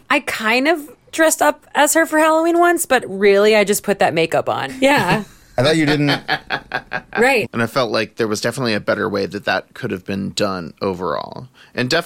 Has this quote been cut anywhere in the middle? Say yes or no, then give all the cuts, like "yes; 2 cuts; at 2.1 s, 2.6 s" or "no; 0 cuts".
yes; 2 cuts; at 4.7 s, 7.4 s